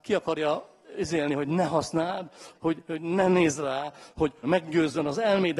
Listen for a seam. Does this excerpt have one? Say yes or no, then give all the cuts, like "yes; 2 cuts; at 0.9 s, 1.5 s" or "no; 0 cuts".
yes; 2 cuts; at 2.5 s, 4.4 s